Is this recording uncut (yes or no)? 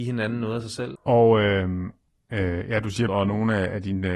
no